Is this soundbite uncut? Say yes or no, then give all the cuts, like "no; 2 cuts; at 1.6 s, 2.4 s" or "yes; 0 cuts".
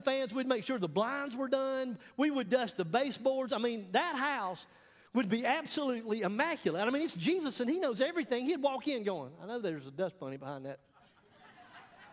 yes; 0 cuts